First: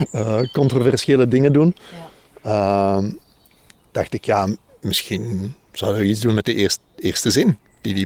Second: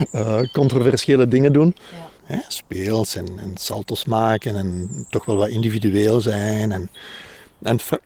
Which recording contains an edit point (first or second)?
second